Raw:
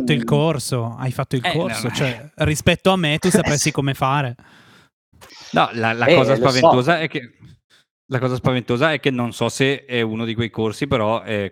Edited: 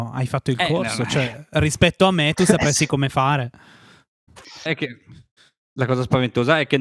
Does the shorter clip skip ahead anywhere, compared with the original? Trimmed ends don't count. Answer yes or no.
yes